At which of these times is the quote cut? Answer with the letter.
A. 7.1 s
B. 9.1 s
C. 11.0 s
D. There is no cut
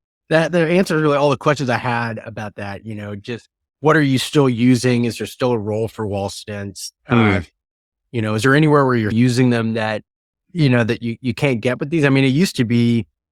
B